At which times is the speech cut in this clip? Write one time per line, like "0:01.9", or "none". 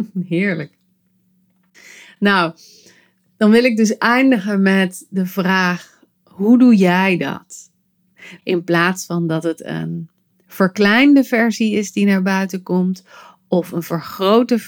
0:08.4